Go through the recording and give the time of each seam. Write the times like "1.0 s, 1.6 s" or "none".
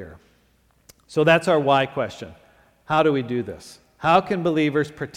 none